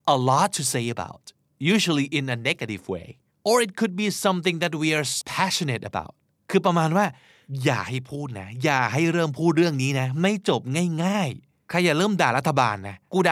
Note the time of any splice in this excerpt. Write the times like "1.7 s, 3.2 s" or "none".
5.2 s